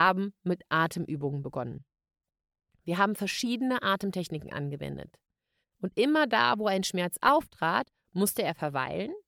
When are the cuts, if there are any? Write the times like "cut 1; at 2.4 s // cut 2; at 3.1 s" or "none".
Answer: cut 1; at 5.6 s

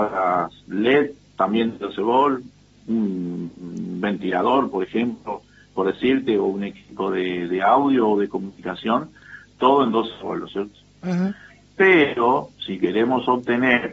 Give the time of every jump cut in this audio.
none

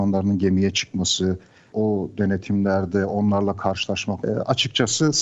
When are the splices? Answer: cut 1; at 4.2 s

